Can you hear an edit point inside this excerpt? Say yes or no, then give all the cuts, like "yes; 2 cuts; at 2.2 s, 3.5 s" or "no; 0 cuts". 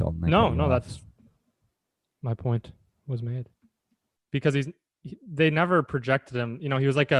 yes; 1 cut; at 4.2 s